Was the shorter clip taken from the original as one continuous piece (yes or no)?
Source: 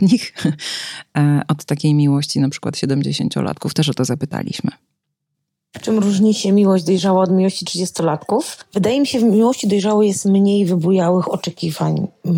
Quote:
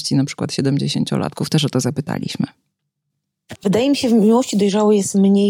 no